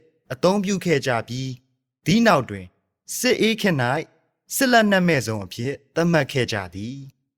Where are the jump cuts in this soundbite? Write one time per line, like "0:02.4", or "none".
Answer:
none